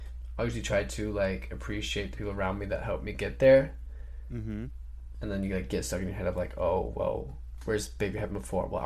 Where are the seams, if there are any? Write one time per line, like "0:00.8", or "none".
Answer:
0:05.1